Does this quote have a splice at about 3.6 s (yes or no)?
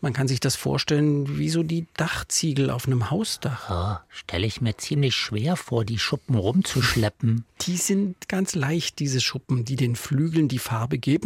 no